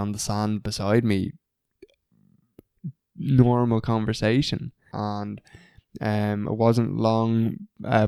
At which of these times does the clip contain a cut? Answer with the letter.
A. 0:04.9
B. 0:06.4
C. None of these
A